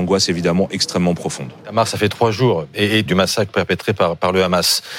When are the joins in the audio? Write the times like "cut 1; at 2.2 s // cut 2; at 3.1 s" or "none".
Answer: cut 1; at 3.1 s